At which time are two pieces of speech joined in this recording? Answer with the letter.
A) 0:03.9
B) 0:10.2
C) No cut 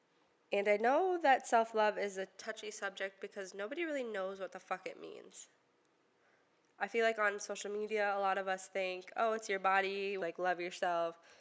B